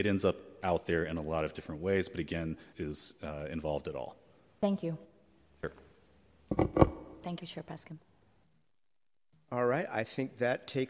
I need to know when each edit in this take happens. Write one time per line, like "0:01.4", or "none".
0:02.7